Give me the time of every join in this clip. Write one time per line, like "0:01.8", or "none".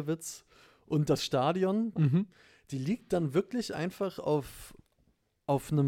0:02.0